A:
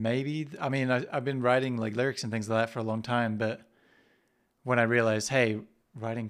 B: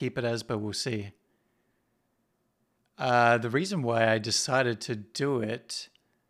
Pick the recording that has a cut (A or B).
B